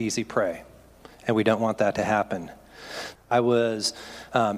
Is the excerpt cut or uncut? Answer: cut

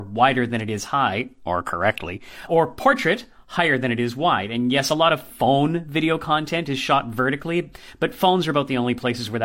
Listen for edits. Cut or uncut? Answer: cut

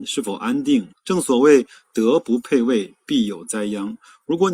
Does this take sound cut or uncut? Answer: cut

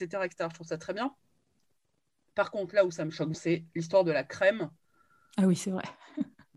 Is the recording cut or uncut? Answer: cut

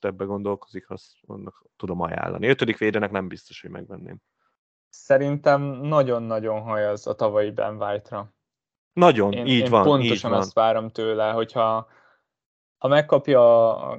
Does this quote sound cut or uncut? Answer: uncut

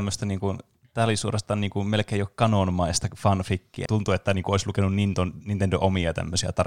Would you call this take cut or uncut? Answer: cut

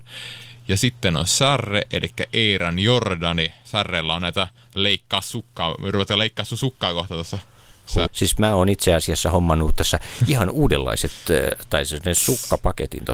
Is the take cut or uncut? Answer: cut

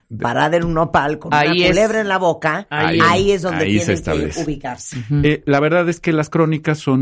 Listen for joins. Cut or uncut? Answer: uncut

